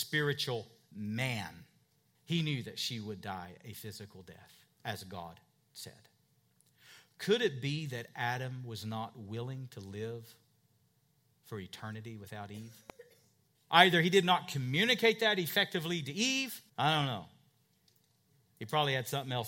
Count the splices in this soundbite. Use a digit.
3